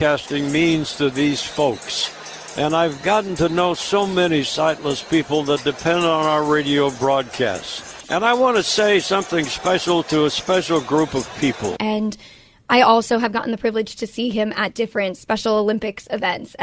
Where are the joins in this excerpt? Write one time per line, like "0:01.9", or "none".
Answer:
0:08.0
0:11.8

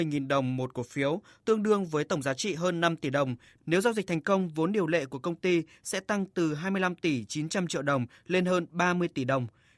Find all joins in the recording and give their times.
none

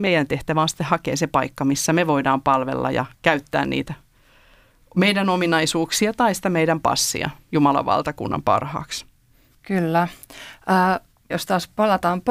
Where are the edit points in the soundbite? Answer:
0:09.5
0:11.3

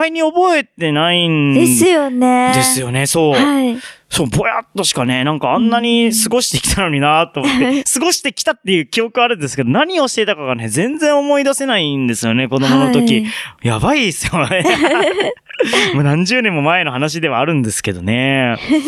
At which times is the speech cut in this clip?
none

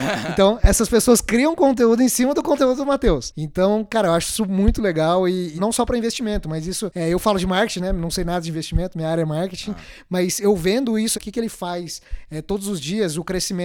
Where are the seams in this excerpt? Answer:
0:05.6
0:11.1

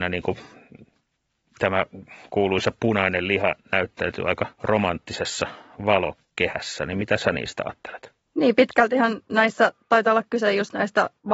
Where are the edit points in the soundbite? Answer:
0:04.5

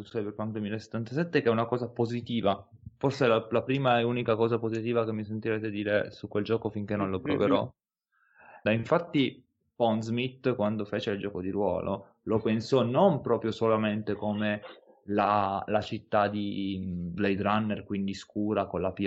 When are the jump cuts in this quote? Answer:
0:08.7
0:17.2

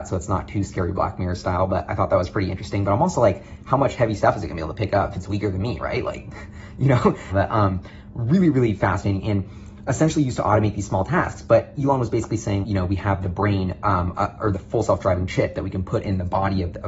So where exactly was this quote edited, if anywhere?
0:07.3
0:12.6

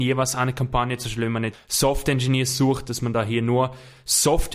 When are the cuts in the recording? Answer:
0:01.5

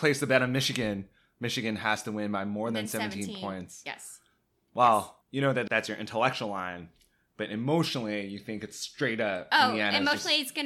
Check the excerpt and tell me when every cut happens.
none

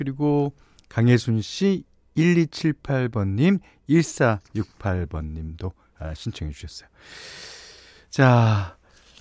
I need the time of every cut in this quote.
none

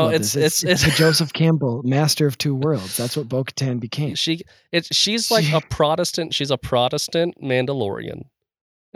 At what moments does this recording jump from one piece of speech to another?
0:04.1

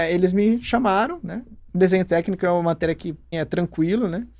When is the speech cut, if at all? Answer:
0:01.7
0:03.3

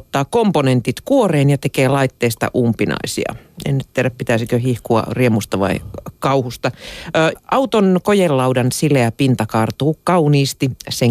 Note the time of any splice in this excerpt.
0:07.4

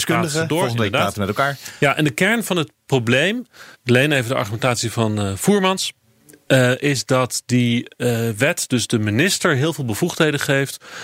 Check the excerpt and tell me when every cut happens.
0:03.7

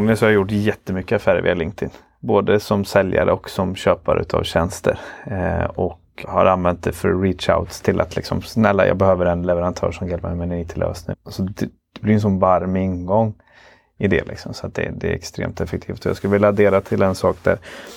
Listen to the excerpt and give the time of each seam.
0:06.2
0:11.1

